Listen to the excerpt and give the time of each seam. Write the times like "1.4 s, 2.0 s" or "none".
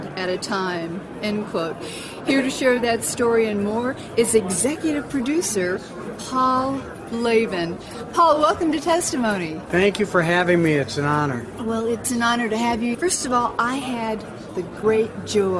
none